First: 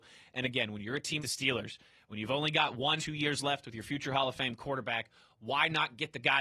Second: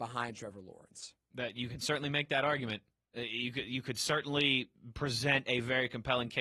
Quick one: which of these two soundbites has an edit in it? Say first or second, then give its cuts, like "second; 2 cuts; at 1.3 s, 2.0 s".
first; 2 cuts; at 1.2 s, 3.0 s